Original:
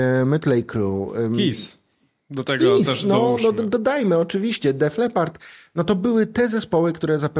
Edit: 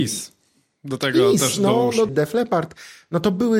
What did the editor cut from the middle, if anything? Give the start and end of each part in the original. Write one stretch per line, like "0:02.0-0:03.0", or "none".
0:03.5-0:04.7